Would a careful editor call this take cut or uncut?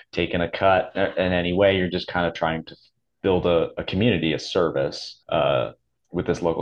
cut